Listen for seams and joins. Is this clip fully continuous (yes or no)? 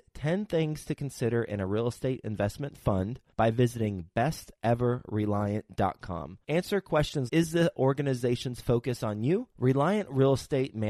no